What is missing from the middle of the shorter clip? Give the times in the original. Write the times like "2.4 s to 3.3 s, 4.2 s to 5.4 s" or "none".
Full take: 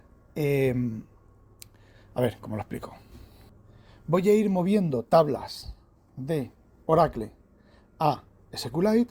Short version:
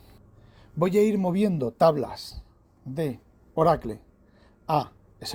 none